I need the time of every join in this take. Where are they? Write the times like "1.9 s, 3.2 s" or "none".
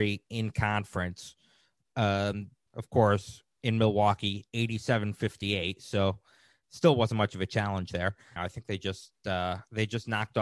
2.7 s, 8.4 s